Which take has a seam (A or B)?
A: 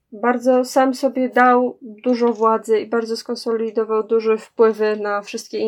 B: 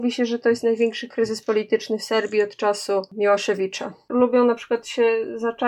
B